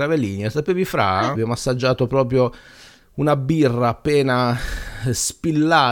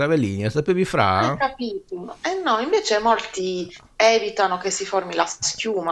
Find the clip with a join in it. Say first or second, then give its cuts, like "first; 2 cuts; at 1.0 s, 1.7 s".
first; 1 cut; at 1.3 s